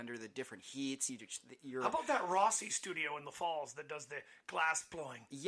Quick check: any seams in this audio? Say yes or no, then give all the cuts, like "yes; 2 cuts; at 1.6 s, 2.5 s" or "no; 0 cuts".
no; 0 cuts